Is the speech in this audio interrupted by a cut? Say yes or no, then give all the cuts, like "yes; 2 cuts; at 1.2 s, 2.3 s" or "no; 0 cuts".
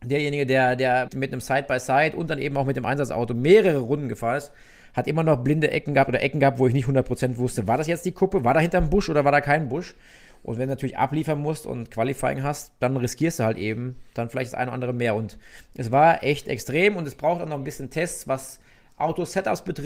yes; 1 cut; at 1.1 s